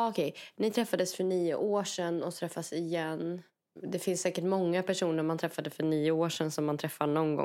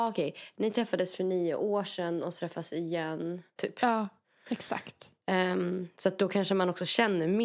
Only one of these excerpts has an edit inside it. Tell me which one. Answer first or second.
second